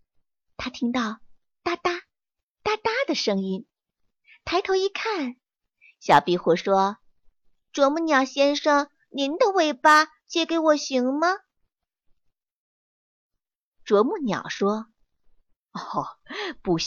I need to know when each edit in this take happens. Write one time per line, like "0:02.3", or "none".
0:05.9